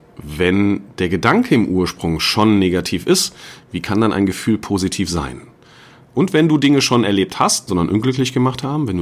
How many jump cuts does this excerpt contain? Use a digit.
2